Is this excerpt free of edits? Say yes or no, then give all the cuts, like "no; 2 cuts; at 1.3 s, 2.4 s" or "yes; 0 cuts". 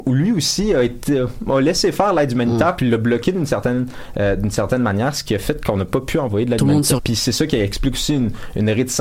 no; 1 cut; at 7.0 s